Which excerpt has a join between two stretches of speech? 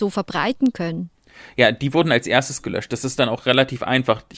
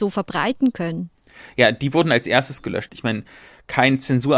second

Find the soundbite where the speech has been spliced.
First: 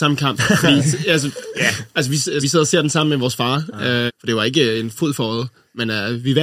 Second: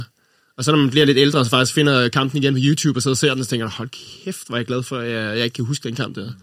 first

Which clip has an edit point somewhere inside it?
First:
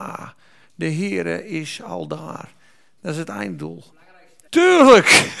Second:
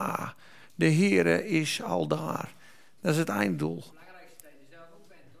first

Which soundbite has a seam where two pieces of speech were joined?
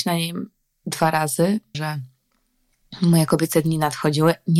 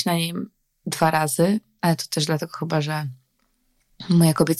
first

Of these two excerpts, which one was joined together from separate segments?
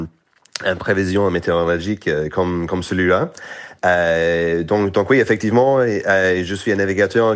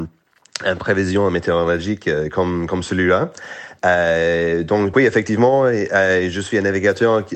second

